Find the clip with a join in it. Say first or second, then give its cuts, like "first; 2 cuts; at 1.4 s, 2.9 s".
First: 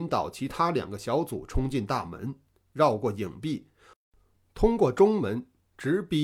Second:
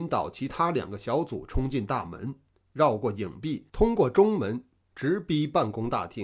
second; 1 cut; at 3.7 s